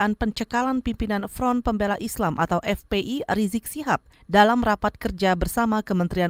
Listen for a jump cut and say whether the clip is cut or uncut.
uncut